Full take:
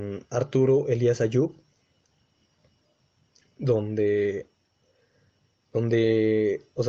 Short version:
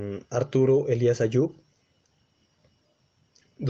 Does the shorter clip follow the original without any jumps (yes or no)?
yes